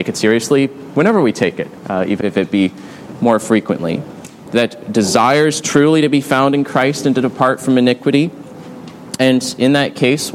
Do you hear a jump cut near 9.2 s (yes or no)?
no